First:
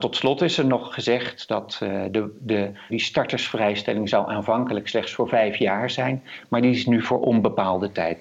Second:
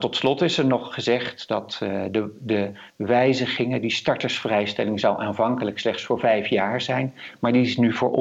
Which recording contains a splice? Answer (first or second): first